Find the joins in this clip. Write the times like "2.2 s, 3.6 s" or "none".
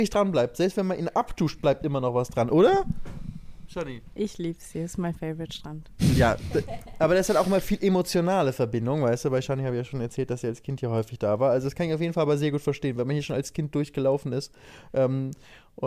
none